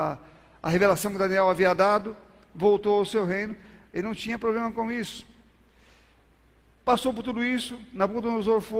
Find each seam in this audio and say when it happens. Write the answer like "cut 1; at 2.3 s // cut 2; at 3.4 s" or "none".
cut 1; at 3.9 s